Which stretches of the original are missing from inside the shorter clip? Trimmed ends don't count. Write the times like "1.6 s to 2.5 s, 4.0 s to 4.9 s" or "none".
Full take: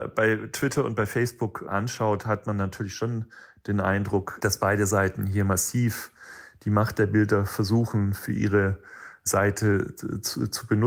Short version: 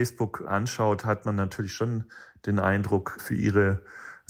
4.4 s to 8.2 s